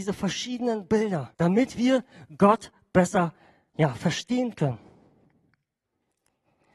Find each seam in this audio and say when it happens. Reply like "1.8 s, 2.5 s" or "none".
1.3 s